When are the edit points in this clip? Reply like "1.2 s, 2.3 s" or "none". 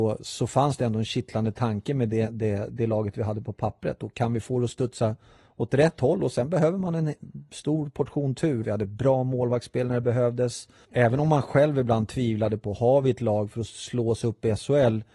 8.6 s, 10.8 s